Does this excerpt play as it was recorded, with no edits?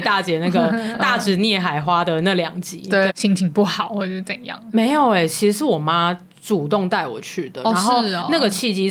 no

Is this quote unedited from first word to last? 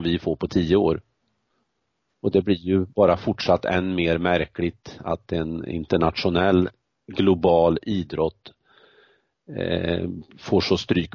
yes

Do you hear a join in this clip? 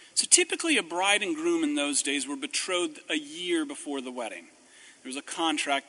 no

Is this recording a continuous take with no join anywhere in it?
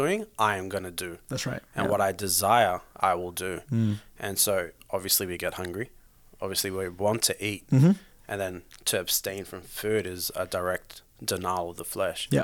yes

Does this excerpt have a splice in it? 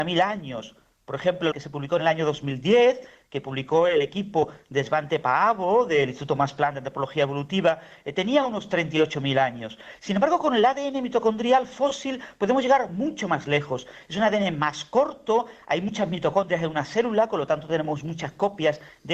yes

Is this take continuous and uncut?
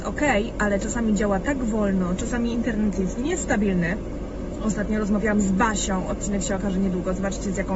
yes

